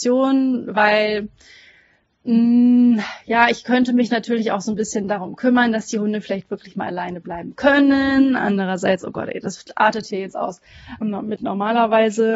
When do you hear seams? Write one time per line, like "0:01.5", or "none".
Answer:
0:11.0